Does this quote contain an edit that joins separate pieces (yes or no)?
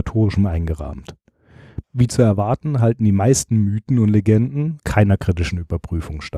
yes